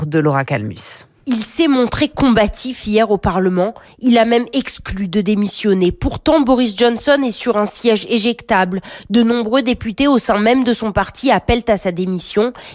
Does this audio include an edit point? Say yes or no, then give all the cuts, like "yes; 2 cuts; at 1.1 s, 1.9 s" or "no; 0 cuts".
no; 0 cuts